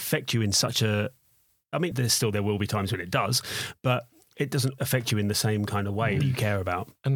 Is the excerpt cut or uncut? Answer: cut